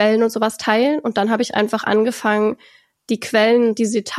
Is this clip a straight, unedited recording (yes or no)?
yes